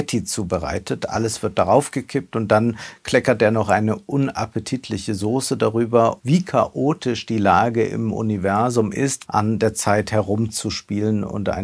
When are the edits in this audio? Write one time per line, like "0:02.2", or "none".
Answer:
0:06.2
0:09.2

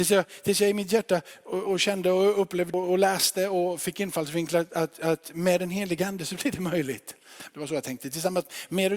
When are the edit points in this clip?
0:01.6
0:07.5

